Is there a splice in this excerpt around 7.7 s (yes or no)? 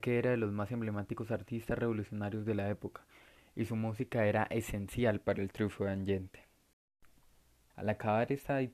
yes